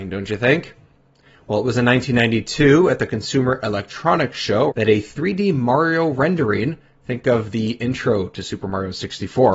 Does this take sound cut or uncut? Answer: cut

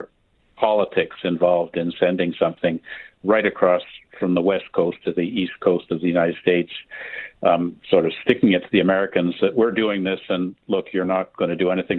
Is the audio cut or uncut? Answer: uncut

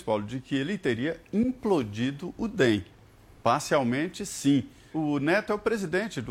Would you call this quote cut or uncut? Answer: cut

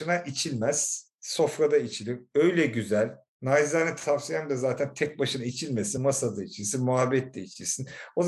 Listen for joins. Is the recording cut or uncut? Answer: uncut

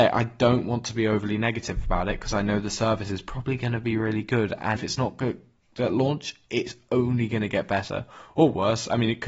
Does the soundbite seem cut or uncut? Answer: cut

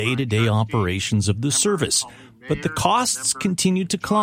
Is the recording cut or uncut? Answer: uncut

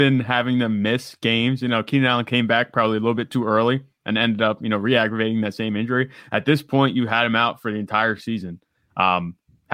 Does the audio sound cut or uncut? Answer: uncut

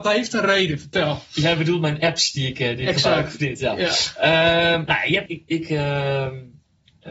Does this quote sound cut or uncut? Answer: cut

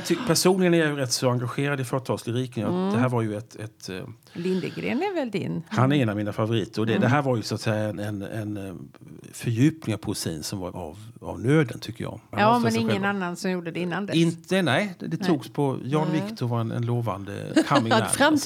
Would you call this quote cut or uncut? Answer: cut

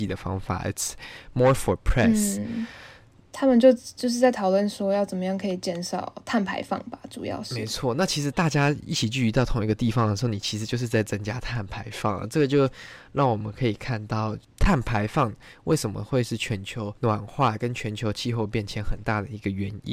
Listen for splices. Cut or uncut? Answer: uncut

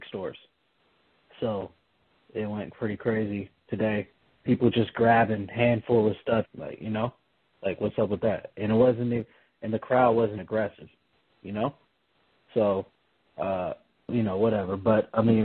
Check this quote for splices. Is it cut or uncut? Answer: cut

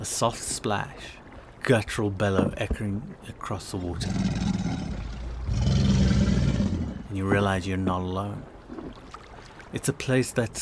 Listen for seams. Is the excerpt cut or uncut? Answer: cut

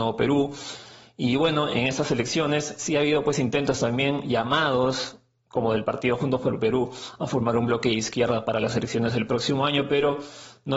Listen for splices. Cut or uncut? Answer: uncut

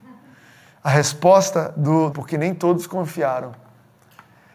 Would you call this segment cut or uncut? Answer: cut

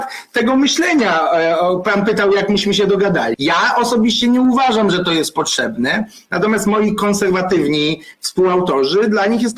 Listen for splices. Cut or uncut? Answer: cut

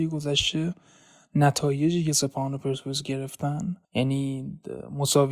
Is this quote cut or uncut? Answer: cut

